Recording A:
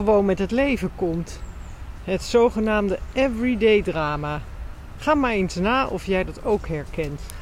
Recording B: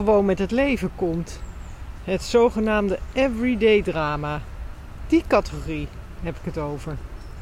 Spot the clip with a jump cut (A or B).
A